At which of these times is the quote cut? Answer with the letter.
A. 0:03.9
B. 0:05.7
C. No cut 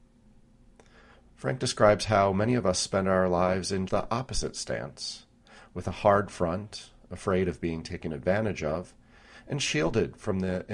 A